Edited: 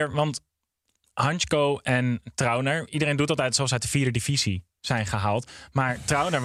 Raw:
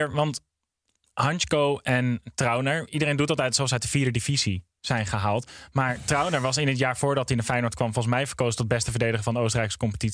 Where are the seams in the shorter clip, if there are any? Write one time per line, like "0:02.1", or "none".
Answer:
none

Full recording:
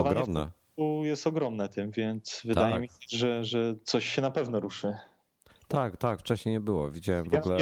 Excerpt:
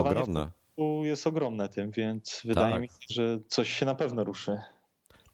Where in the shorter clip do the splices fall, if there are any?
0:03.1

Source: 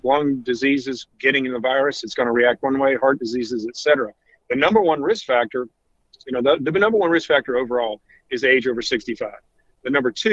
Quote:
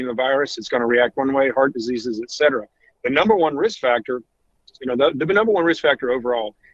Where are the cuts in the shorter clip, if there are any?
none

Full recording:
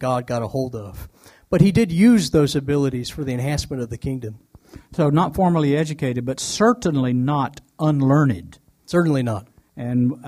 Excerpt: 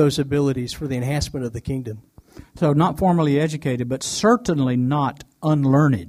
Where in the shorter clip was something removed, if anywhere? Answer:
none

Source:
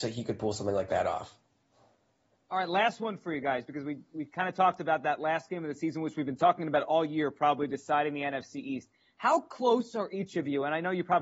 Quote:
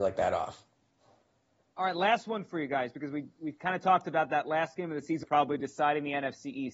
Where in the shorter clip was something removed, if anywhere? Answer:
0:05.2

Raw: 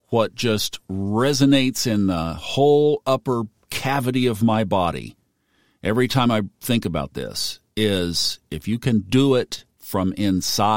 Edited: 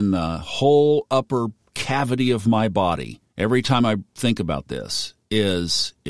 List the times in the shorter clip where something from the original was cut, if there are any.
0:03.3

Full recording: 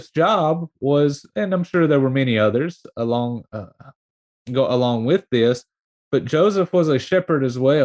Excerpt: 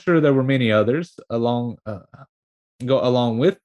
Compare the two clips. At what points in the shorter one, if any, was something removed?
none

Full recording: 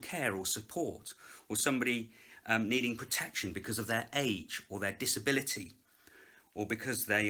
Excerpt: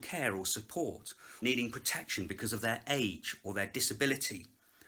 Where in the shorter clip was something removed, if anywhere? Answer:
0:01.4

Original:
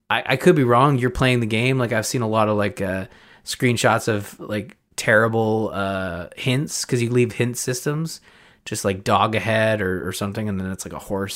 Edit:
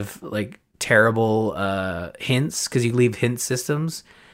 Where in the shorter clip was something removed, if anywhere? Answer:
none

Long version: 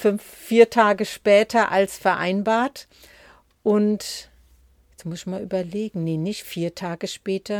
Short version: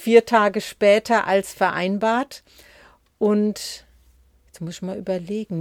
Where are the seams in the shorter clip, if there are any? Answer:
none

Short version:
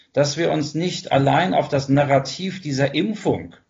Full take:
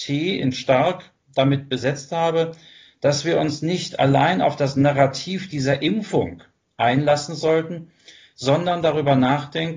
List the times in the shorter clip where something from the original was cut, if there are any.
none

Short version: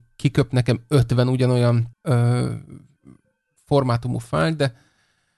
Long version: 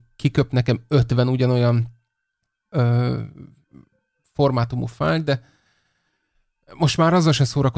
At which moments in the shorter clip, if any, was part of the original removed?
0:01.9

